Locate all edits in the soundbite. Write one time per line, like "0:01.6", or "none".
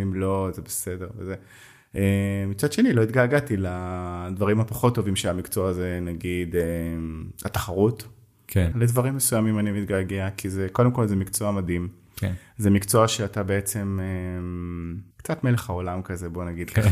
0:08.7
0:15.1